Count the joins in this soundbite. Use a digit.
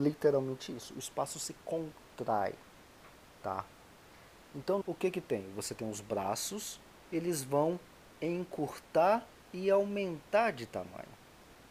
2